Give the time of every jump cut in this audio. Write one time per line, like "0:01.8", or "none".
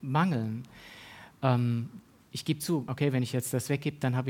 0:02.9